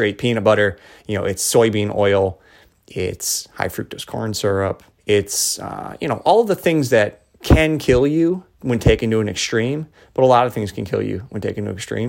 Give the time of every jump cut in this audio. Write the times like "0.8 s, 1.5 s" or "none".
4.9 s, 7.3 s, 8.5 s